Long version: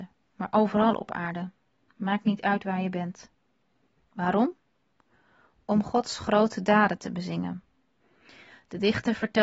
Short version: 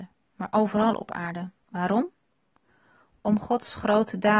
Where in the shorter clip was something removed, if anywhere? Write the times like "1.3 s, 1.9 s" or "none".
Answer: 1.6 s